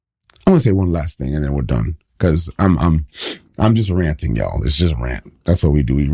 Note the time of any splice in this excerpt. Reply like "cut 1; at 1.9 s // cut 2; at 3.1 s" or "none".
none